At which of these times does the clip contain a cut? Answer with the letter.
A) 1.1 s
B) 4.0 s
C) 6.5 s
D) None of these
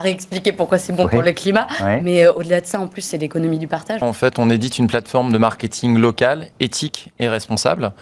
B